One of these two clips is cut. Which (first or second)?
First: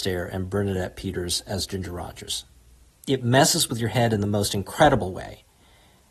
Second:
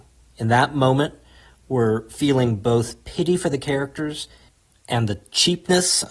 first